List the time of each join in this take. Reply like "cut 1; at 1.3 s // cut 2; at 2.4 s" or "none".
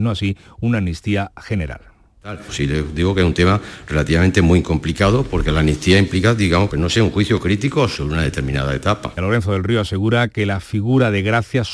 cut 1; at 6.7 s // cut 2; at 9.2 s